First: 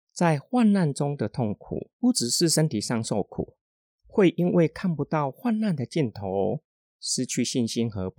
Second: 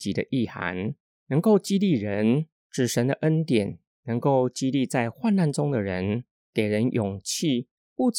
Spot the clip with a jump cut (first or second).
first